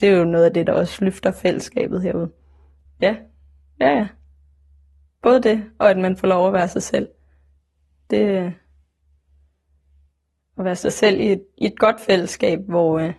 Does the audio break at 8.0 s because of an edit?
no; 1 cut; at 2.9 s

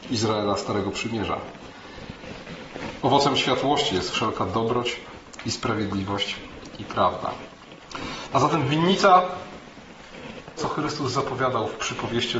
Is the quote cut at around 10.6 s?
yes; 3 cuts; at 3.0 s, 8.3 s, 10.6 s

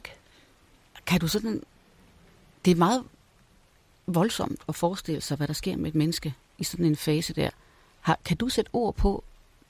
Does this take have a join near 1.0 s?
no; 0 cuts

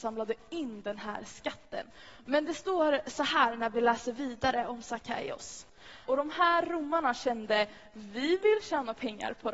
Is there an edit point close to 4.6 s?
no; 2 cuts; at 2.2 s, 6.1 s

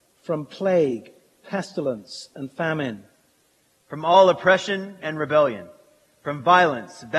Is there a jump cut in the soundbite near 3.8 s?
yes; 2 cuts; at 3.8 s, 5.0 s

